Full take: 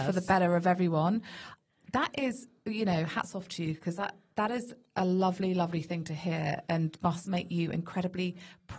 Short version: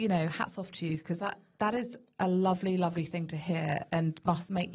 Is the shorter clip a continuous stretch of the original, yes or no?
yes